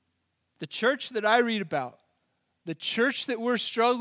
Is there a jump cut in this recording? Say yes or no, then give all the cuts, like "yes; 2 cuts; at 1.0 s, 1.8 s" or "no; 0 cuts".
no; 0 cuts